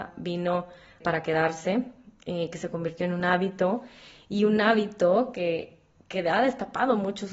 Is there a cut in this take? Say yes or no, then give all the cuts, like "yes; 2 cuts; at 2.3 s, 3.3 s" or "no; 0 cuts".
no; 0 cuts